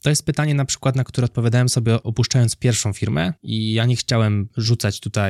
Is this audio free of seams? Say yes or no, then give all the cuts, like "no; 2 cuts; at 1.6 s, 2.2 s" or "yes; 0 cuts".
no; 1 cut; at 3.4 s